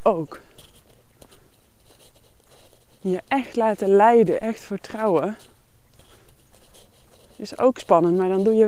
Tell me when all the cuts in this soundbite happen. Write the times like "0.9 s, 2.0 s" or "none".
none